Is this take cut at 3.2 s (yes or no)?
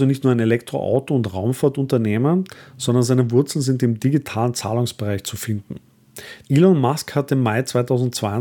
no